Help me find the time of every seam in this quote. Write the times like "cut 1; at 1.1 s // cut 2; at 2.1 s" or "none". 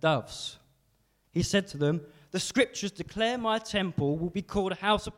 cut 1; at 1.2 s